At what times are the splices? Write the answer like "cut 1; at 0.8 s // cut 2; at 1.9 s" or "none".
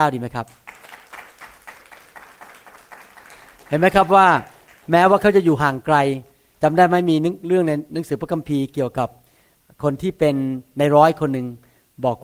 none